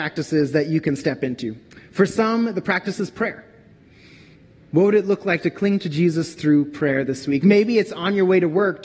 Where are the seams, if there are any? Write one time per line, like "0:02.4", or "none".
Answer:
none